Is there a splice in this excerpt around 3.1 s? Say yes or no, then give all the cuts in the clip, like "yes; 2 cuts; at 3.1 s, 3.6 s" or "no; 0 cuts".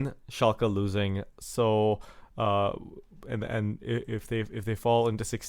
no; 1 cut; at 1.3 s